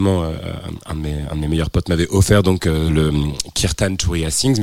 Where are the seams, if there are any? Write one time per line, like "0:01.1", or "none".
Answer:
none